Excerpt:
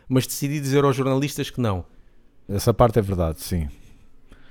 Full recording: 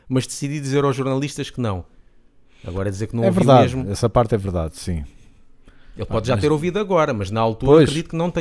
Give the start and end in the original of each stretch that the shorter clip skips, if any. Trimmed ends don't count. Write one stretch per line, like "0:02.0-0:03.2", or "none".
0:02.5-0:03.8